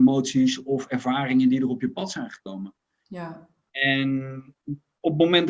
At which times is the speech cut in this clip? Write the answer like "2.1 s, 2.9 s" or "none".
none

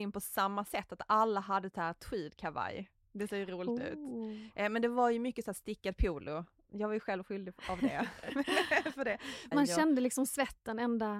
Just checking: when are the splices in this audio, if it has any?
9.5 s

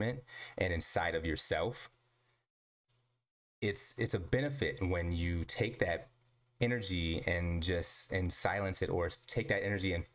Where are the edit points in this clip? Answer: none

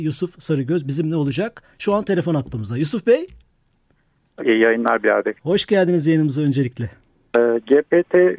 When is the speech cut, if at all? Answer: 4.4 s, 7.3 s

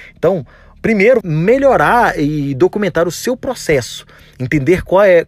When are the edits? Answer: 1.2 s

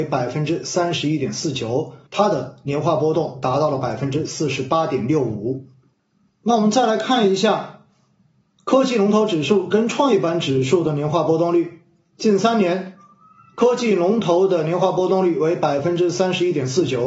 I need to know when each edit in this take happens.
2.1 s

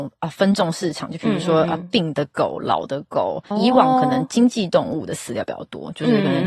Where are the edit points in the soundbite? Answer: 3.5 s

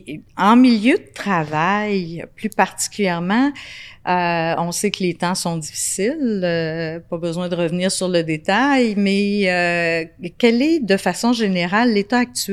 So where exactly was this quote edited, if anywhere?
none

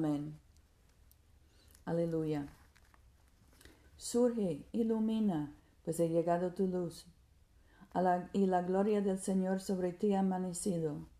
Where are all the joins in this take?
3.8 s

